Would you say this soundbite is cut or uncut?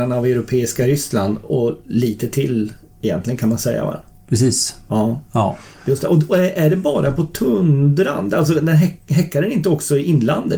uncut